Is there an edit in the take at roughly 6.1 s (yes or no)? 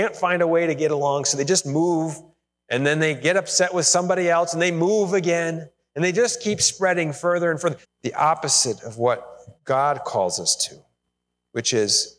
no